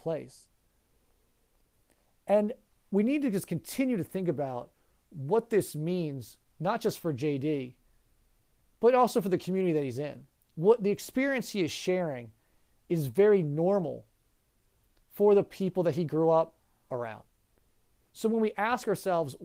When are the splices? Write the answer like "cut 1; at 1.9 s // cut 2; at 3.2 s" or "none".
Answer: none